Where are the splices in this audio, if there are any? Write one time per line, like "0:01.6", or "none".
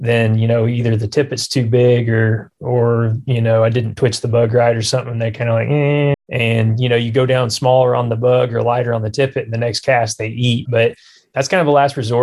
0:06.1
0:10.7